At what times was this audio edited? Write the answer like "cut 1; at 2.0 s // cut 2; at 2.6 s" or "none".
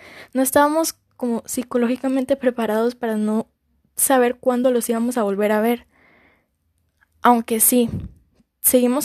none